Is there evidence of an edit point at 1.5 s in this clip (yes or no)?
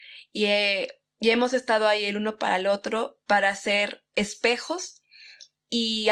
no